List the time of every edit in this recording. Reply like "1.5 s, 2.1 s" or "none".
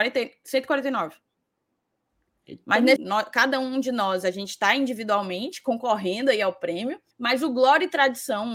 3.0 s, 7.1 s